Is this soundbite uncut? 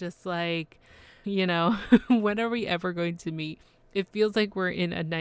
no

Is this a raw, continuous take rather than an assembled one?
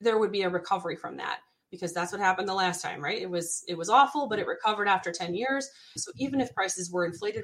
no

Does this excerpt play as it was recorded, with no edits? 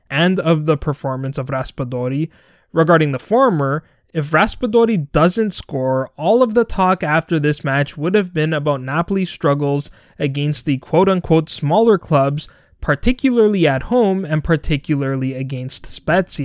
yes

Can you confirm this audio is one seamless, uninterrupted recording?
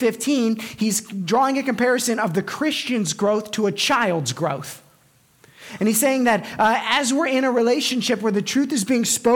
yes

